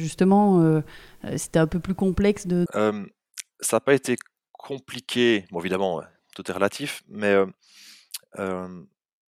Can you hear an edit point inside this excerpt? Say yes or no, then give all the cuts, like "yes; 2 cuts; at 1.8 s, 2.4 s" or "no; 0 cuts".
yes; 1 cut; at 2.7 s